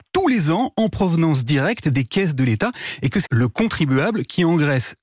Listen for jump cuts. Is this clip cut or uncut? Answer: cut